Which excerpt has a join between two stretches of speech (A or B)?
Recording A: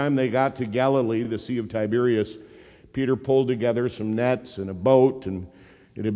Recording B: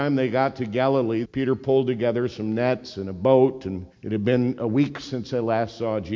B